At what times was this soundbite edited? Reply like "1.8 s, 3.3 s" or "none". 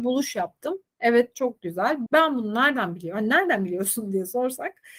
2.1 s